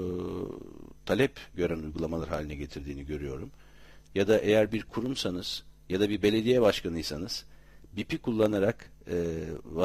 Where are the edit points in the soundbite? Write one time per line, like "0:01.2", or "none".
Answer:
0:04.0